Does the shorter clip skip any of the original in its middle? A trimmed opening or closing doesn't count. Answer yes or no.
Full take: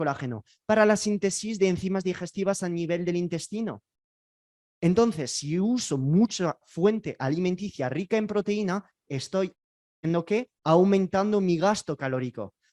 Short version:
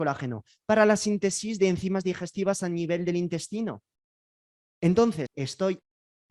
yes